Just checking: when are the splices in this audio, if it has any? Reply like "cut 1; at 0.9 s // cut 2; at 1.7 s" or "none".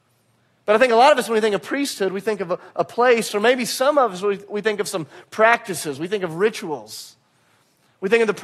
none